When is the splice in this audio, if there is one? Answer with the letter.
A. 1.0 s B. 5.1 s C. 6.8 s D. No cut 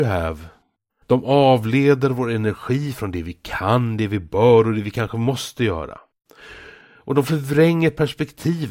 A